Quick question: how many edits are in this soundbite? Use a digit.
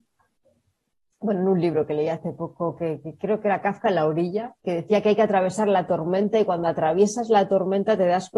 1